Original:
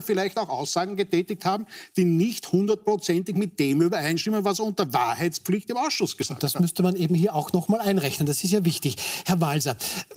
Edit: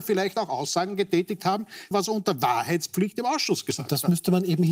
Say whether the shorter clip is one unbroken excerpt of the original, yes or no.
no